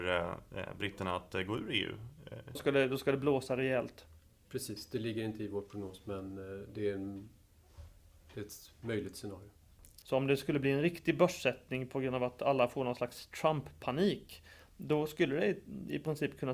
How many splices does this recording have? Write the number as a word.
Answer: two